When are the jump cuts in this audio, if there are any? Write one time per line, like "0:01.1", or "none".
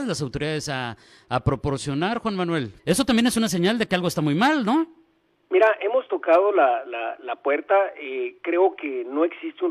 0:02.8